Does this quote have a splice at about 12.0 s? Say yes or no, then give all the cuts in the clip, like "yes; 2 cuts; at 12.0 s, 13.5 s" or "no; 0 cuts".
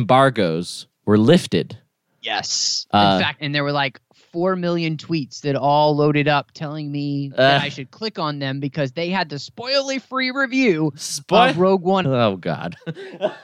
yes; 2 cuts; at 3.4 s, 12.0 s